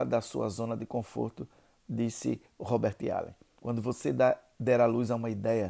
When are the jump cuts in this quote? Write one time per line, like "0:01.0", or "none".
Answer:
0:03.6